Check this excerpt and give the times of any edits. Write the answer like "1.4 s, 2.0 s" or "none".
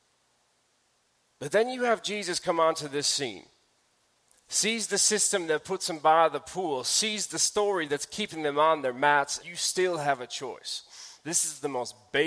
9.4 s